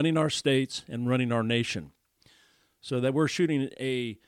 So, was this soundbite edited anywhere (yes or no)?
no